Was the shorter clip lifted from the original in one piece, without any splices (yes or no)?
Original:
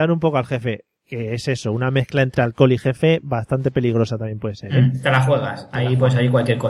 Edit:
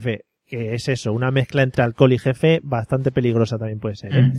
yes